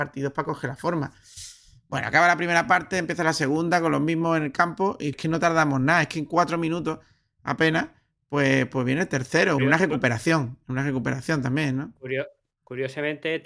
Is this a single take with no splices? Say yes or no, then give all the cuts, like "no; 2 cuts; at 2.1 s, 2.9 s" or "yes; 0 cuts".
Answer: no; 2 cuts; at 5.1 s, 9.6 s